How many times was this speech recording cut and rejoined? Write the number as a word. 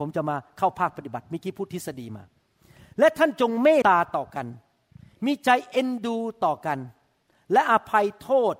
one